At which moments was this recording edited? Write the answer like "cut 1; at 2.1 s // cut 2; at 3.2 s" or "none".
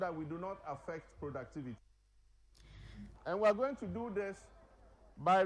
cut 1; at 3.1 s